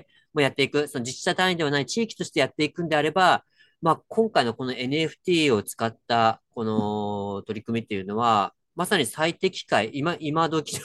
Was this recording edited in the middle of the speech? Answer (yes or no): no